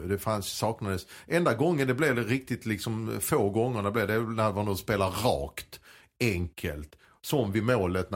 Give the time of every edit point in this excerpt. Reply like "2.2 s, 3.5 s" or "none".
none